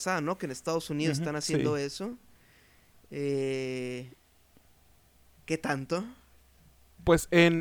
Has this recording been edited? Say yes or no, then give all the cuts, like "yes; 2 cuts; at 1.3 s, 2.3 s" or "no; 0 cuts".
no; 0 cuts